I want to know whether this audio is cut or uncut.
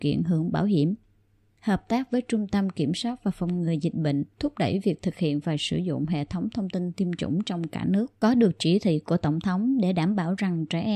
cut